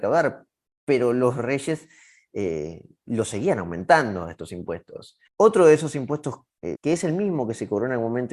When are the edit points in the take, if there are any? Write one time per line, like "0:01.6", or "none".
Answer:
0:05.3
0:06.7